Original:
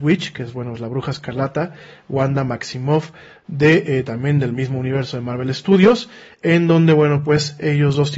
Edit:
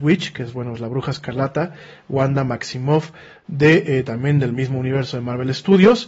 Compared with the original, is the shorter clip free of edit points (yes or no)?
yes